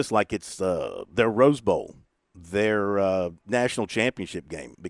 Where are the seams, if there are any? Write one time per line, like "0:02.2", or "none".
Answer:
none